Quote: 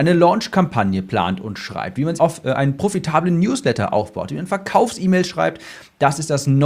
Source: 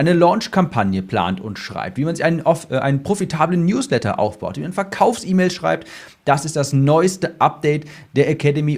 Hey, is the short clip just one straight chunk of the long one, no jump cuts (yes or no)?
no